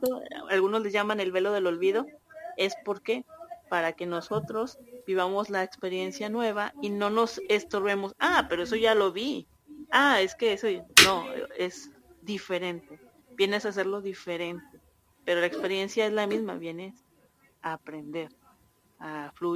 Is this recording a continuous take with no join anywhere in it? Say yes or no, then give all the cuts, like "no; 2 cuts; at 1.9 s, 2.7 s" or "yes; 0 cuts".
no; 1 cut; at 15.1 s